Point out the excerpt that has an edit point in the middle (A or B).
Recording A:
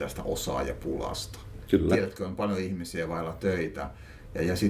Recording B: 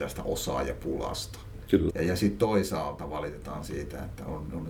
B